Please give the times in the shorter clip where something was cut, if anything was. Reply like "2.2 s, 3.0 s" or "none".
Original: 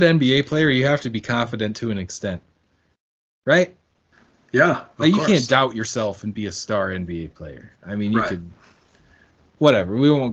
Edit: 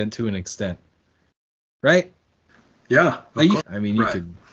3.6 s